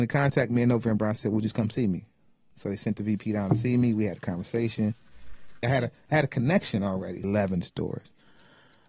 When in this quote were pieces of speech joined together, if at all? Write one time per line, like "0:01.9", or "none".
0:05.6
0:07.2